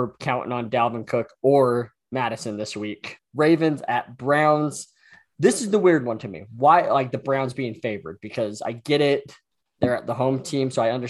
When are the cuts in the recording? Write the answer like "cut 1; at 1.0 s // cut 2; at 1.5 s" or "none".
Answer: cut 1; at 3.2 s